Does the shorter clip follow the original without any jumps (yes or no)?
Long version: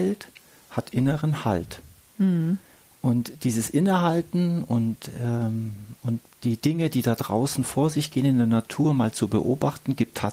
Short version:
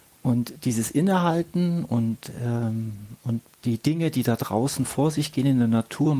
yes